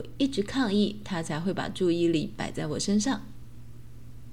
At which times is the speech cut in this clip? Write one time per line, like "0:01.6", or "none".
none